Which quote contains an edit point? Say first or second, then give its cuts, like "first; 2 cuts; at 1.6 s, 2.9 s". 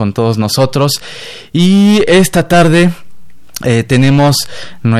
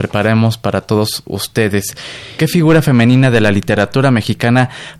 second; 1 cut; at 2.4 s